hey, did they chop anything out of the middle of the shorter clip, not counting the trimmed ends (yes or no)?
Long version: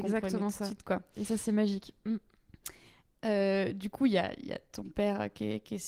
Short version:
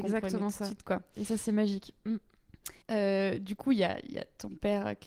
yes